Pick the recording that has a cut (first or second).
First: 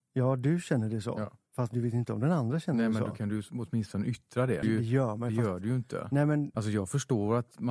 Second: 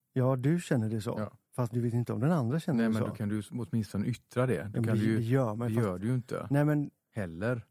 first